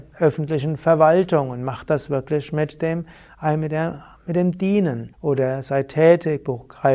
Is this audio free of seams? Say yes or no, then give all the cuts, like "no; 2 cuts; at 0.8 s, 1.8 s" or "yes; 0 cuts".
no; 1 cut; at 5.1 s